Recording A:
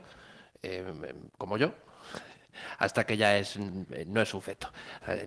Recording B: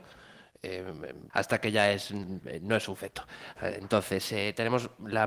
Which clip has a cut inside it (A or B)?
B